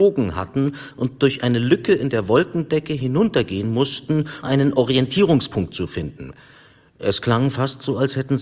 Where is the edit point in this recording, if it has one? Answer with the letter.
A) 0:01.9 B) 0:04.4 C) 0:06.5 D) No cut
B